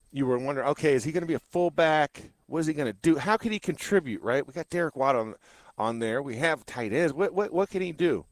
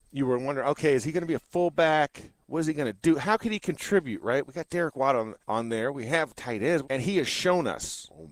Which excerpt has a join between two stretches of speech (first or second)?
second